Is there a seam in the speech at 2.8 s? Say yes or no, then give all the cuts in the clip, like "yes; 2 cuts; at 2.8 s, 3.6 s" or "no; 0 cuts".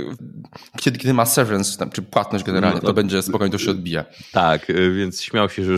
yes; 1 cut; at 2.8 s